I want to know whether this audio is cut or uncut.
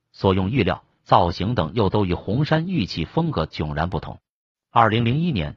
cut